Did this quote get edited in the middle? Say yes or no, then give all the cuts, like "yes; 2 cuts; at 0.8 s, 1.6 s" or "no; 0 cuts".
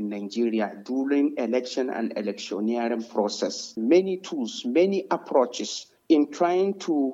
yes; 1 cut; at 3.8 s